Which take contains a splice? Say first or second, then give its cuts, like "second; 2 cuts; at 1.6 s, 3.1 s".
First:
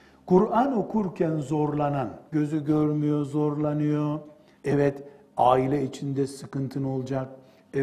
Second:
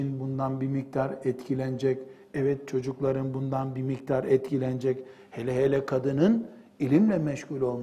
first; 2 cuts; at 2.3 s, 4.6 s